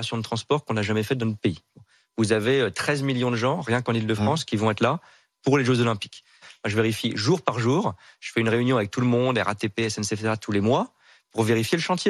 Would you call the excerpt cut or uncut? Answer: uncut